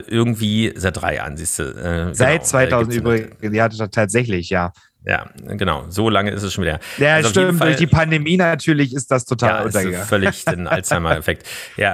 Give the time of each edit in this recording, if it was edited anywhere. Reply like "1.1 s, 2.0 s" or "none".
none